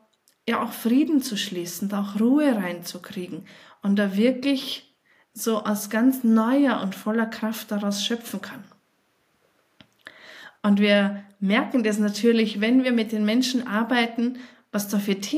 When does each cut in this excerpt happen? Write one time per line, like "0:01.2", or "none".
0:10.6